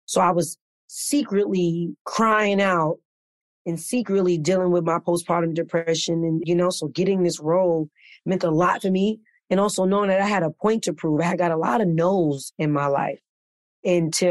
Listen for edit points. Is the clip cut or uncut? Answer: cut